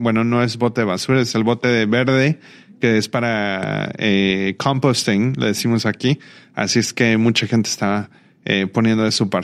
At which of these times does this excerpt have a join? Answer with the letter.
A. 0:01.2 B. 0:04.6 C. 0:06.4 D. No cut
D